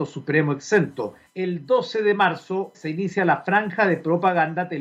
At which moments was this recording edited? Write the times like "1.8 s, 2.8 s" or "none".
1.3 s, 2.7 s

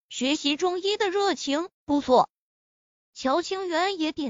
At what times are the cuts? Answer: 1.7 s

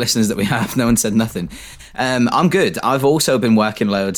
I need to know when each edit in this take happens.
none

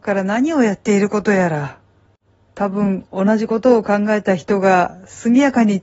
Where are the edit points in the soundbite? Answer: 2.5 s

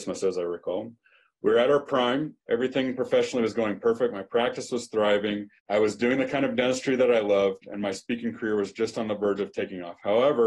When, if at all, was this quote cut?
2.4 s, 5.6 s

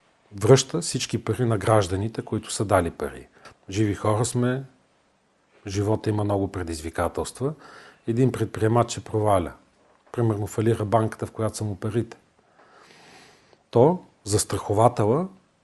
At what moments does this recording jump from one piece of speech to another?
3.5 s

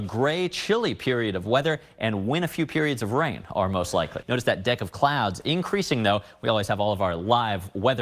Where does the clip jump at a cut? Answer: 4.2 s

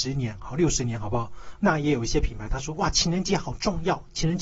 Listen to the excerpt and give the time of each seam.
1.5 s

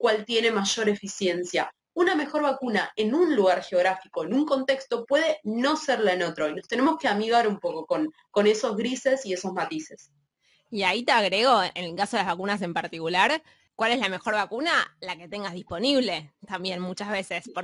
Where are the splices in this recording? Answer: 13.7 s

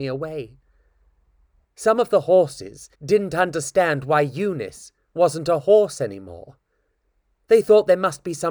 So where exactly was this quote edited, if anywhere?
1.6 s, 2.9 s

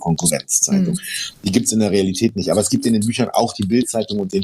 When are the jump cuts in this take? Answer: none

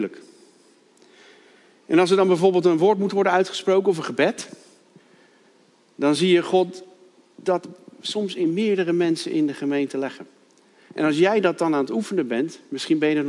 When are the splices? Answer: none

